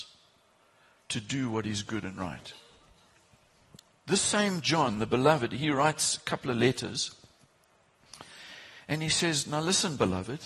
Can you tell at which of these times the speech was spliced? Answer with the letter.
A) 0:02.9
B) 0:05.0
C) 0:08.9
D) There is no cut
D